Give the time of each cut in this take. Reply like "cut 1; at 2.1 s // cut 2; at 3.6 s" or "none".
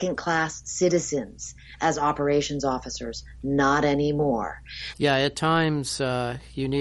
cut 1; at 4.9 s